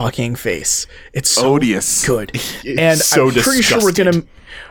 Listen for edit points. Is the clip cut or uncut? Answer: uncut